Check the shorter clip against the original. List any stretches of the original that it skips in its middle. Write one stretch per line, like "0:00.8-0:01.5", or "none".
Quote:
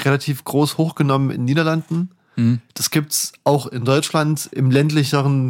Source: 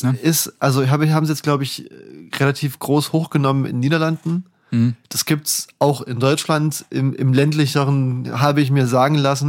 0:06.9-0:07.2

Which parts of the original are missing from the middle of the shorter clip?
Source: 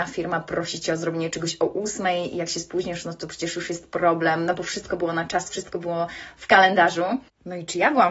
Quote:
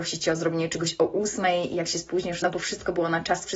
0:03.0-0:04.5

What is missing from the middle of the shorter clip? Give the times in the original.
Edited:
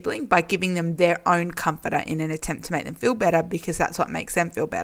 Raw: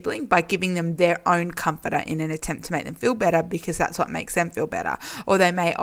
none

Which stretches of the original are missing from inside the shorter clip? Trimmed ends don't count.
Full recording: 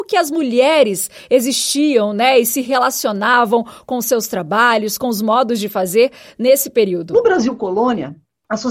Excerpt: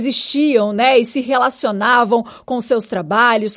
none

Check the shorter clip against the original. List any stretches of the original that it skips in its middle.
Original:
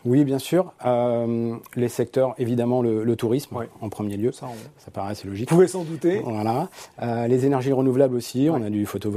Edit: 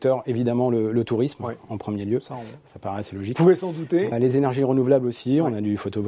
0:06.2-0:07.2

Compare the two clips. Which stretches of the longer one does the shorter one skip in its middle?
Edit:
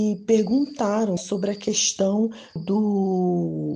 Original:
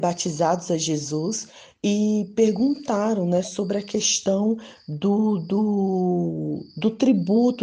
0:03.3-0:03.4
0:04.8-0:05.4

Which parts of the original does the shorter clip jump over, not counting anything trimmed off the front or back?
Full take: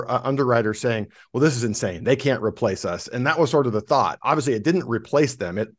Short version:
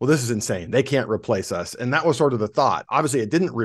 none

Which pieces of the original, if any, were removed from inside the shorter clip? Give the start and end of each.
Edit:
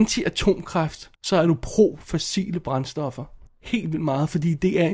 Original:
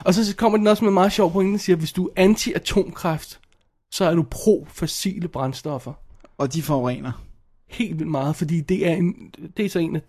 0:03.4-0:03.8
0:06.2-0:07.5

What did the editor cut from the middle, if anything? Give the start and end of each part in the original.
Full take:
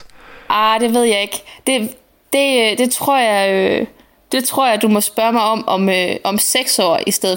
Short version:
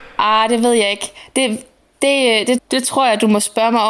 0:02.9-0:04.2

